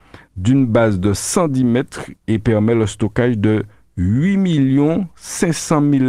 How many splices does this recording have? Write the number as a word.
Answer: zero